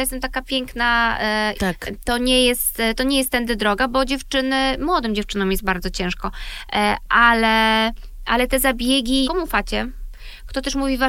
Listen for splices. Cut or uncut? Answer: cut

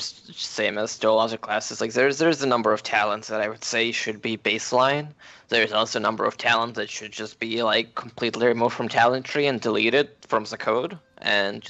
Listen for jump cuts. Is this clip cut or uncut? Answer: uncut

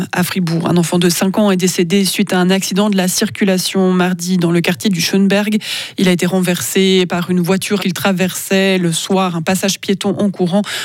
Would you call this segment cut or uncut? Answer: cut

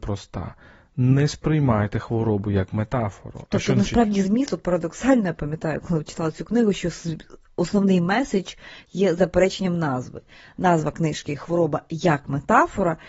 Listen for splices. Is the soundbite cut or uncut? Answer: uncut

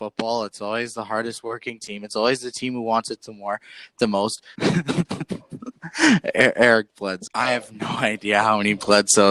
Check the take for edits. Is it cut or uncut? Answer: cut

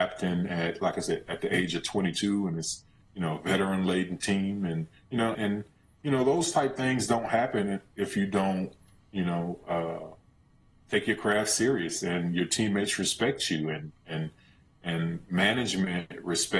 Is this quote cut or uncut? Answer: cut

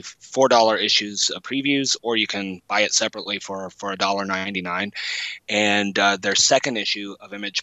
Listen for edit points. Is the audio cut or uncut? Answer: uncut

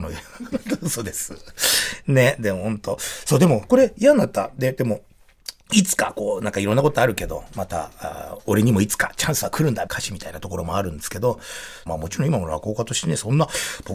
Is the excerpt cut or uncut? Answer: cut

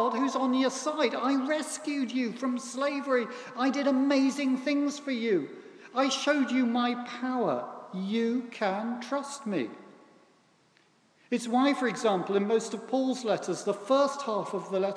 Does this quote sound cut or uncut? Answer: uncut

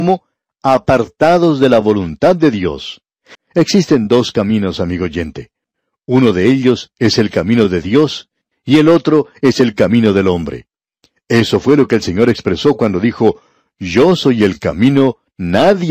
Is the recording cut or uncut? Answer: cut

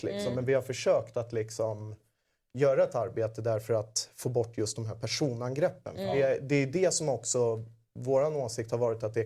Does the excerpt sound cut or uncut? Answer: uncut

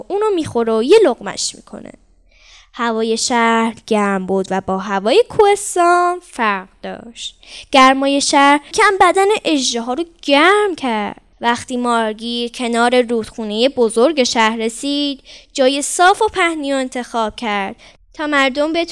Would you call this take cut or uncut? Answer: cut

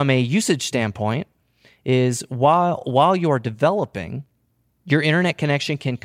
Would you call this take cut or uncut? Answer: uncut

